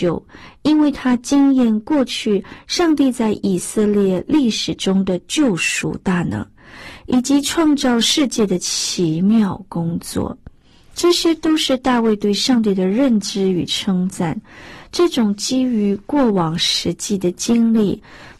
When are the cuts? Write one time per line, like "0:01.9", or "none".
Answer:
none